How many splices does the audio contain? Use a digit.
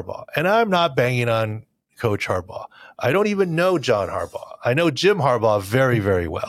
0